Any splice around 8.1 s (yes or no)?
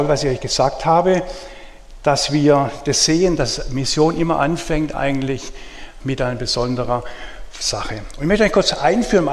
no